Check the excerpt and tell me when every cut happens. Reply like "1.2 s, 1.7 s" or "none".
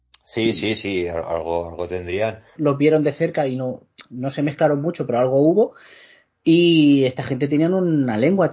2.6 s